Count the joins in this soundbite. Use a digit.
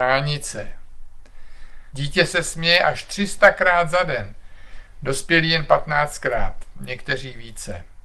1